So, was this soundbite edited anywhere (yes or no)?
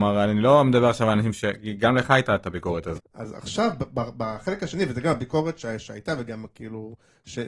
yes